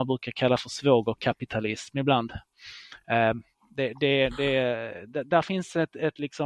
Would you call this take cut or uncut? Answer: uncut